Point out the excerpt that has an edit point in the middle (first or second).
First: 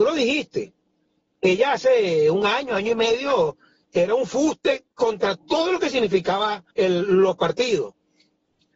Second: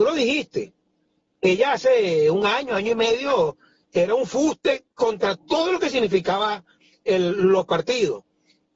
first